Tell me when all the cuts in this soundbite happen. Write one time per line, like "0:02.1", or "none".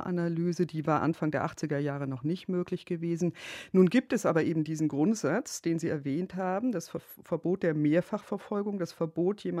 none